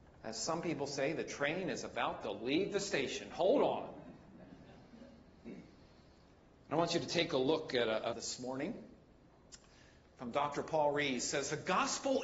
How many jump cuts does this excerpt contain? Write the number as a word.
one